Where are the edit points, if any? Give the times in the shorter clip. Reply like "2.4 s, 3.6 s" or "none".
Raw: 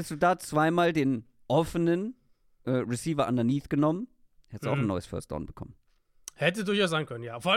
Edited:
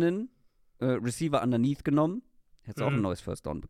none